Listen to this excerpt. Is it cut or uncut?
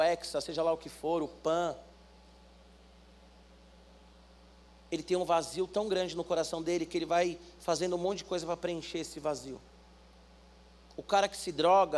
uncut